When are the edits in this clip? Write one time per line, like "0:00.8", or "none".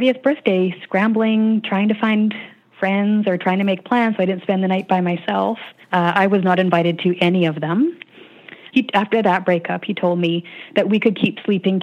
0:05.8
0:08.7